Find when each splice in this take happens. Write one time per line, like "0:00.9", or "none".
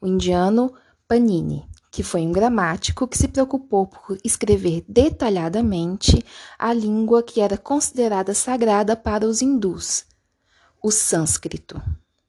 none